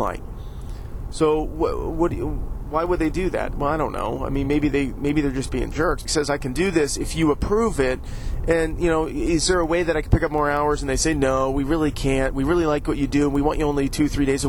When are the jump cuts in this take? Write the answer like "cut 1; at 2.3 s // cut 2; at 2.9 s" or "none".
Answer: cut 1; at 6.1 s